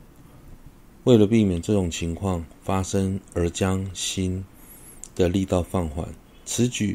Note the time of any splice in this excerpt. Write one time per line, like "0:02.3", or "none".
none